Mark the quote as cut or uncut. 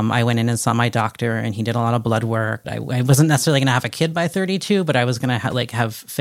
cut